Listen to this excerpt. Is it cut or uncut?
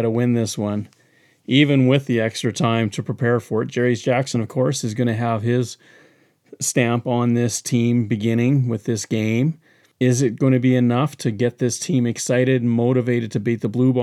uncut